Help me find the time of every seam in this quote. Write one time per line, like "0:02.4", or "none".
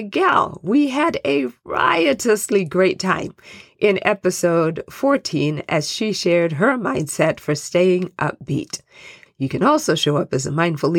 0:09.3